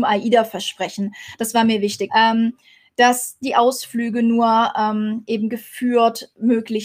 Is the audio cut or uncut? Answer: cut